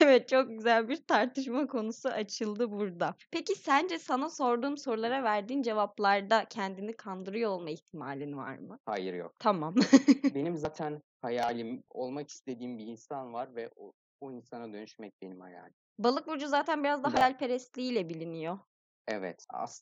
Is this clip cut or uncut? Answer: uncut